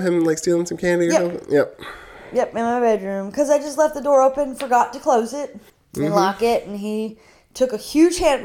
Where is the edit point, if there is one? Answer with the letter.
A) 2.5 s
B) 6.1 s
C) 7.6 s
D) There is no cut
D